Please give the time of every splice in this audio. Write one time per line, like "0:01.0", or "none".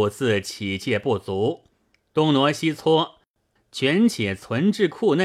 0:03.6

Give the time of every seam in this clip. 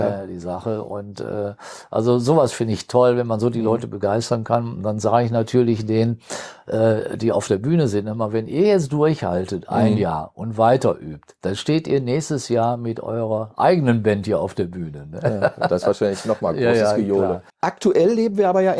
0:17.5

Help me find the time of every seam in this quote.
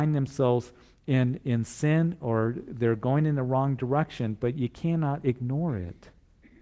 none

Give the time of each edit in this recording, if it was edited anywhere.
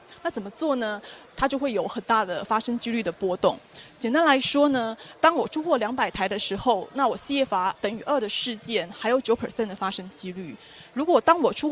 0:01.3

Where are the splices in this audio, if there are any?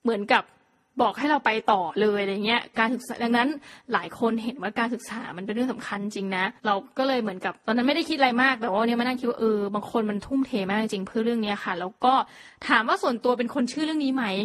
0:06.6

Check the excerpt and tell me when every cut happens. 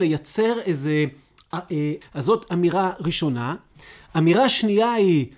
0:02.0

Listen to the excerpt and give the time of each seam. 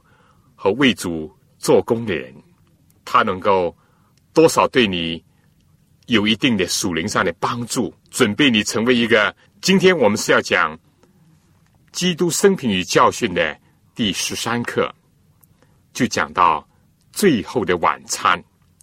0:02.9
0:08.0
0:09.5

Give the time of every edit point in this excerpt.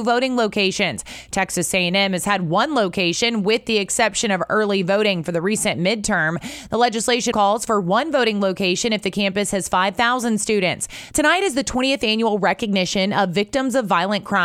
0:07.3
0:11.1

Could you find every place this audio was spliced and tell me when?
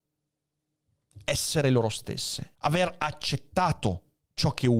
0:02.6

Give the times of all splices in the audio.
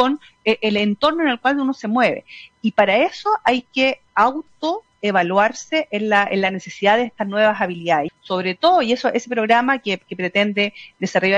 0:04.1
0:08.1

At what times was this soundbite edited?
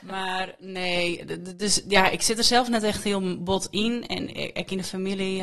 none

